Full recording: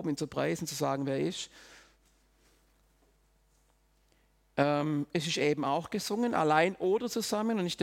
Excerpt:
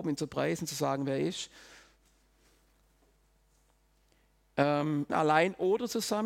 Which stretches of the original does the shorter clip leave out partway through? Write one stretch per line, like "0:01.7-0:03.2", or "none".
0:05.1-0:06.3